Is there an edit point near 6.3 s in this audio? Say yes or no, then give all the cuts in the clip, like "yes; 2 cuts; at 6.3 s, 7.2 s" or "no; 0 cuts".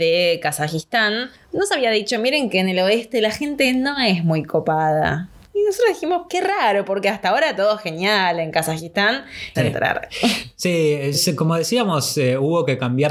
yes; 3 cuts; at 6.3 s, 9.5 s, 11.1 s